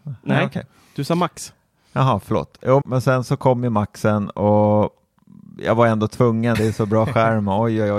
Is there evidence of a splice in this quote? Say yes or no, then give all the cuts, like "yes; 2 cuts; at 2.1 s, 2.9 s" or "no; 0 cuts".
yes; 2 cuts; at 2.8 s, 6.5 s